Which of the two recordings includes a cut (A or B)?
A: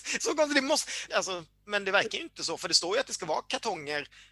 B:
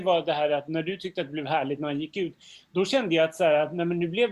A